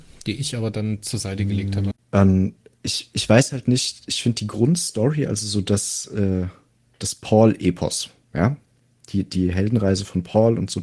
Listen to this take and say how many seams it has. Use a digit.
1